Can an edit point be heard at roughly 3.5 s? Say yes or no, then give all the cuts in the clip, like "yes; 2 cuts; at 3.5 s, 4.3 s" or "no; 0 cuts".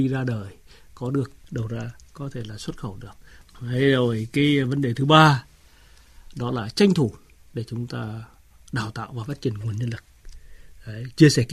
no; 0 cuts